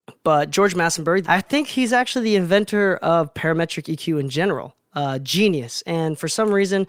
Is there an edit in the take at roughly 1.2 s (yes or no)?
yes